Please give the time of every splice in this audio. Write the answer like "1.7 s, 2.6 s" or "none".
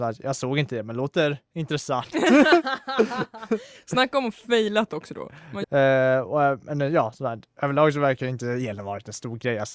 5.6 s

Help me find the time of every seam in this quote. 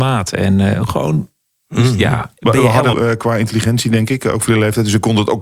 2.9 s

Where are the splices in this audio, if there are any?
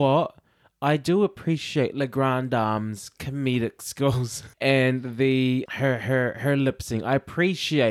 4.5 s, 5.7 s

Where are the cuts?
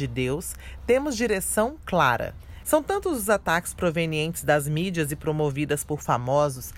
2.6 s

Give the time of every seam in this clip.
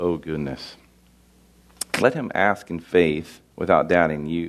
3.5 s

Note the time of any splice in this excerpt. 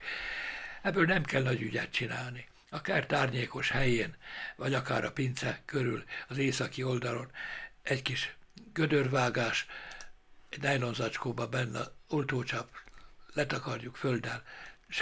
none

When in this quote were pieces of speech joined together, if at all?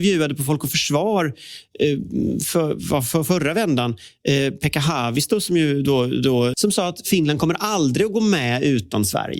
6.5 s

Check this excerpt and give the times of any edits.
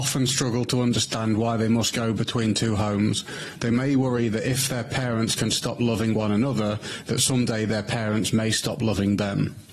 none

